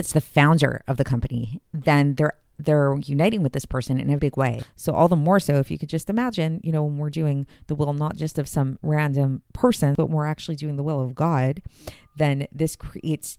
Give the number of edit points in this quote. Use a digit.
1